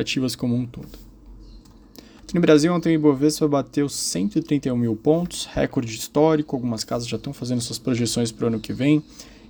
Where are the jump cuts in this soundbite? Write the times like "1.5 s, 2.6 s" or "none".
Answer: 2.2 s